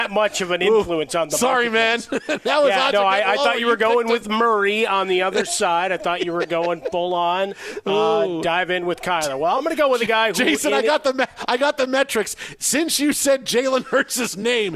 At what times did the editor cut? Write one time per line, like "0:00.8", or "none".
none

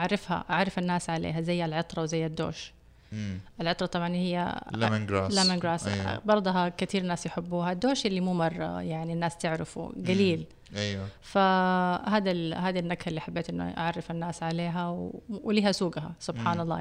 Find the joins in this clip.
none

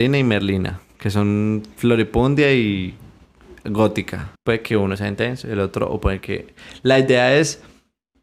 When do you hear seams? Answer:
0:04.3

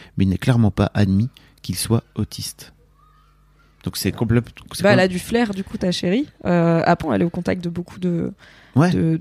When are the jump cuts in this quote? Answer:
0:07.0

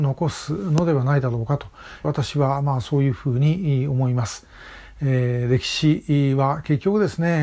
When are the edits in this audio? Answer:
0:02.0

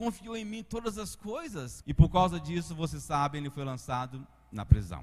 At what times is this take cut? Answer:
0:01.8

